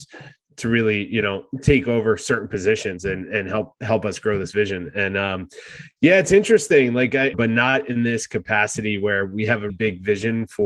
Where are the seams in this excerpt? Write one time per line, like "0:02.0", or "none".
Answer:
0:07.3
0:09.7